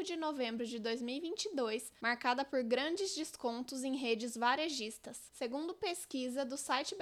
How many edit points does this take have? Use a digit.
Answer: 2